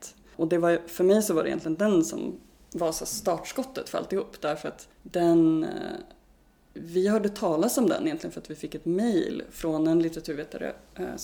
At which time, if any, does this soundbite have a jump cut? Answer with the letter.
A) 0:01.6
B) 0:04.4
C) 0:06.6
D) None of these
D